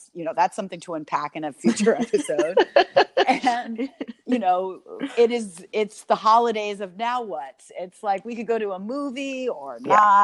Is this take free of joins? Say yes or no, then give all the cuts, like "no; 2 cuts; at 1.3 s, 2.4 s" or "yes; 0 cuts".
yes; 0 cuts